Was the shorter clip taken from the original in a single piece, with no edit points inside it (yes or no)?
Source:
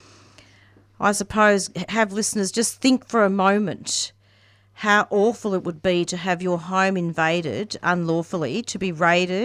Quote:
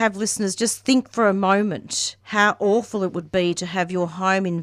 no